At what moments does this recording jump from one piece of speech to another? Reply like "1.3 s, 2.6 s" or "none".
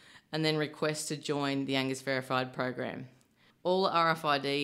3.5 s